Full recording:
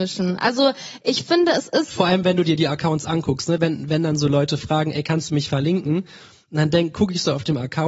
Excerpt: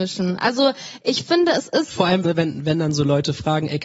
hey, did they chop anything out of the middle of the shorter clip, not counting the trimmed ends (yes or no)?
yes